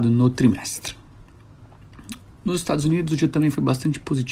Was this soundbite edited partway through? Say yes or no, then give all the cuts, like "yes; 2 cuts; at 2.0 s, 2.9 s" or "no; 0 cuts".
no; 0 cuts